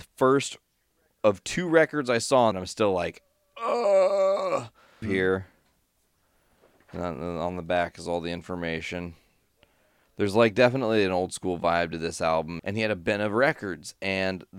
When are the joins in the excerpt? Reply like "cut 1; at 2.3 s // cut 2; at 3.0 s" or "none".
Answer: cut 1; at 2.5 s // cut 2; at 5.0 s // cut 3; at 12.6 s